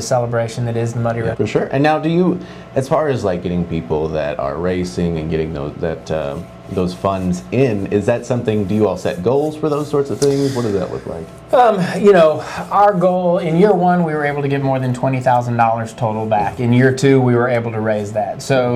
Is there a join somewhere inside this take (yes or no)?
yes